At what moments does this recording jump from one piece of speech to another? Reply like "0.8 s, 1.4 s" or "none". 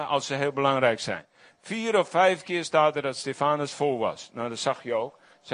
none